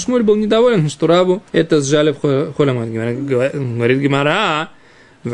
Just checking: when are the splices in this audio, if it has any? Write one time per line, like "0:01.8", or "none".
0:01.5